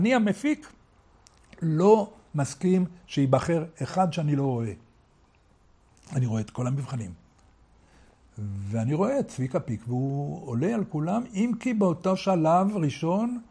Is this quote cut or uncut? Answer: uncut